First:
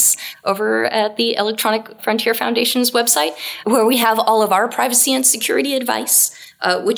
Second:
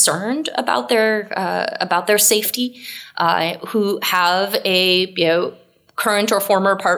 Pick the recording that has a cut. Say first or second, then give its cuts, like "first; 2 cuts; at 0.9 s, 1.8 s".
first; 2 cuts; at 2.0 s, 3.6 s